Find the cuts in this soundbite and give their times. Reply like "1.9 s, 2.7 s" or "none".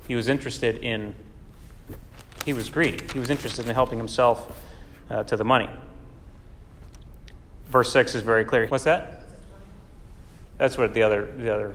8.7 s, 10.5 s